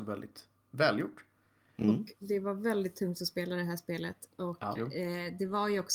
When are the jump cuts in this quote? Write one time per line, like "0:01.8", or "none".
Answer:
0:04.8